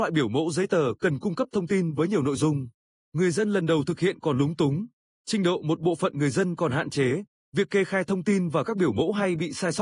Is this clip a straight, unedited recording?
yes; 0 cuts

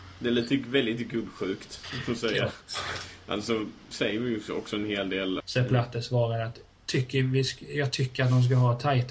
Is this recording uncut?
no; 2 cuts; at 3.9 s, 5.4 s

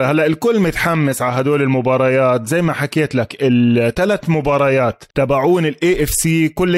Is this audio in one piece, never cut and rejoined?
no; 1 cut; at 5.1 s

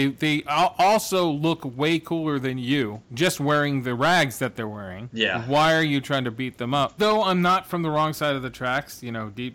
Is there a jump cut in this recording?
yes; 1 cut; at 7.0 s

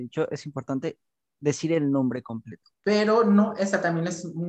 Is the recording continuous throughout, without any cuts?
no; 1 cut; at 2.7 s

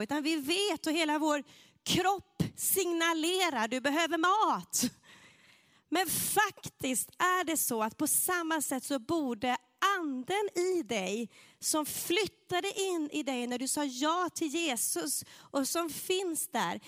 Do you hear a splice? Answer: no; 0 cuts

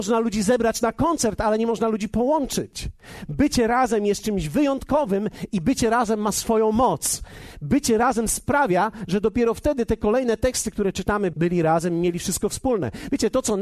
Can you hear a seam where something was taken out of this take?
yes; 2 cuts; at 3.3 s, 11.3 s

